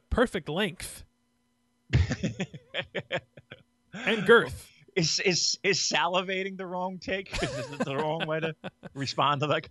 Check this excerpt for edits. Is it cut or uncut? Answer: uncut